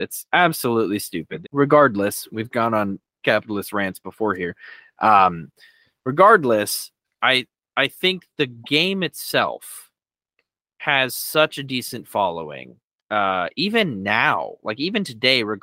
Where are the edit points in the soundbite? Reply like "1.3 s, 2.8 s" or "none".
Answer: 1.4 s, 7.0 s